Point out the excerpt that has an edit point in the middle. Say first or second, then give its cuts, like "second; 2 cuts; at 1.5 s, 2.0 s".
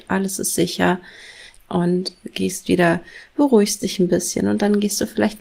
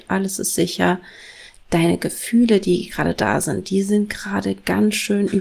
first; 1 cut; at 1.6 s